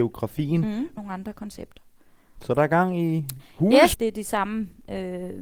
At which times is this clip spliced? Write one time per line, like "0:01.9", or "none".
0:01.0
0:03.9